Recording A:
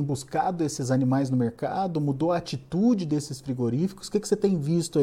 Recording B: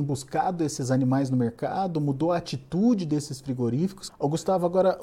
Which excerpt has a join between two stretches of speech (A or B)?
B